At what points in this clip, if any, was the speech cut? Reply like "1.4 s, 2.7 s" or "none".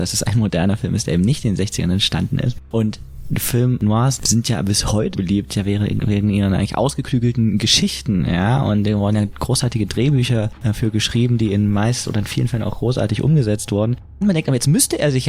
5.1 s, 14.2 s